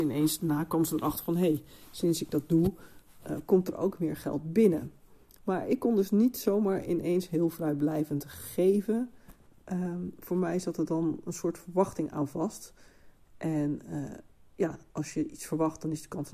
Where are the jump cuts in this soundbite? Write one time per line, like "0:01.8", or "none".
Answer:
none

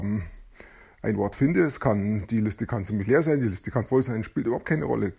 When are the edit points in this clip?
none

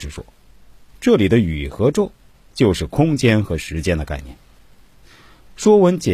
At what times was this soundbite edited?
none

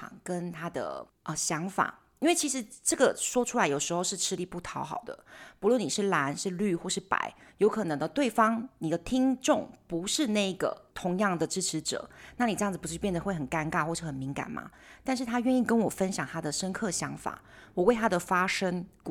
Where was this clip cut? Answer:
0:10.9

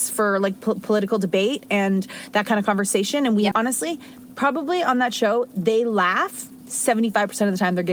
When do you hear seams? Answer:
0:03.5

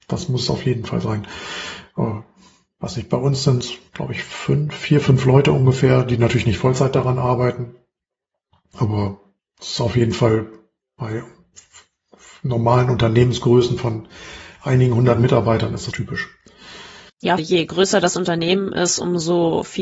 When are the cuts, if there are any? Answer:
0:15.9
0:17.4

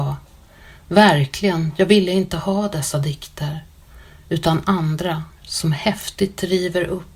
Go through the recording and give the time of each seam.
0:05.4

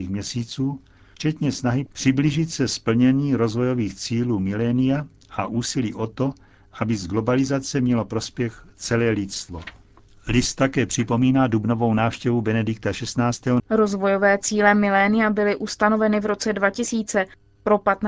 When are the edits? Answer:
0:13.6

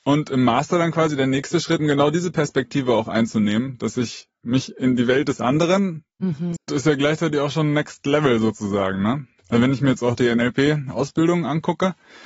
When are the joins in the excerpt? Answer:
0:01.8
0:06.6

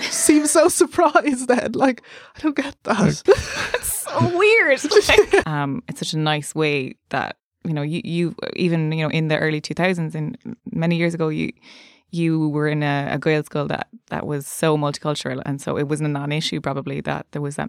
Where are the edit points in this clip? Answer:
0:03.3
0:05.4

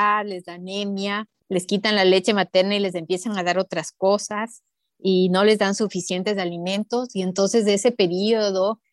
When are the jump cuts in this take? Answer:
none

